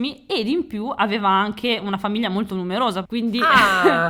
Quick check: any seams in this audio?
yes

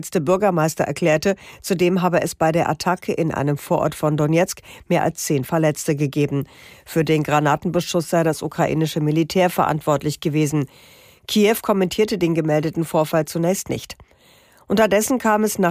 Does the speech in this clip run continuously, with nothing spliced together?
yes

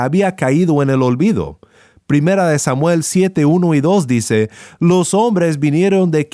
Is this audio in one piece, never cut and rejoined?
yes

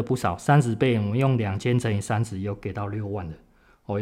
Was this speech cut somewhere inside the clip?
no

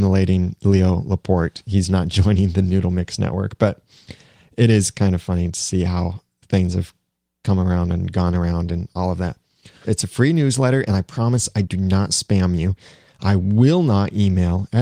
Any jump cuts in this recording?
yes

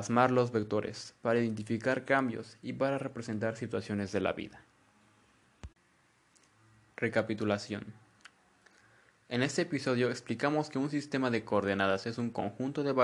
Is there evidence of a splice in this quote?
no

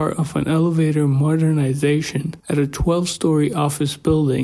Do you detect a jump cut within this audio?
yes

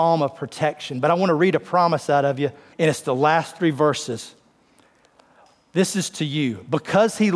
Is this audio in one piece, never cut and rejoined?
no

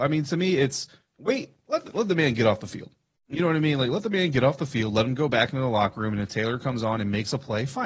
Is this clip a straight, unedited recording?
yes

